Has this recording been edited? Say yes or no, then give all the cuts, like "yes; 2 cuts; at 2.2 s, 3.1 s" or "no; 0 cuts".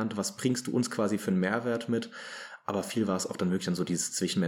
no; 0 cuts